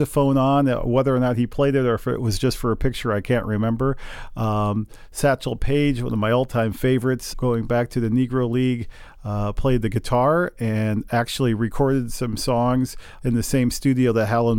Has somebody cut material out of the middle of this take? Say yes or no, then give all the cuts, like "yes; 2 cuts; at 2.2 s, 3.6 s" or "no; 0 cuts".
yes; 2 cuts; at 7.3 s, 13.2 s